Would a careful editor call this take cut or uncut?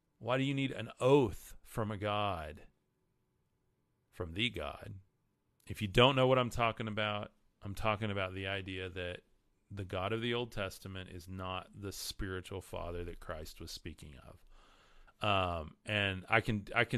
cut